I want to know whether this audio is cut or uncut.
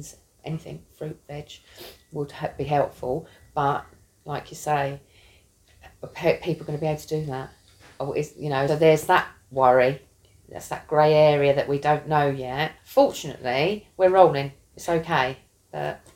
cut